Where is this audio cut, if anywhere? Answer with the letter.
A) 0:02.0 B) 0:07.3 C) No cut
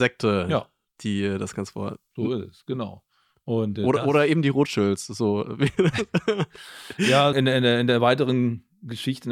B